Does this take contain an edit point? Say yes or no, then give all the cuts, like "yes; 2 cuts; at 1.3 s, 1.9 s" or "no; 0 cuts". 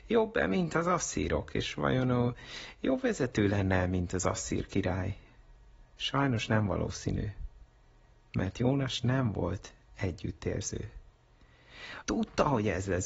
yes; 1 cut; at 12.0 s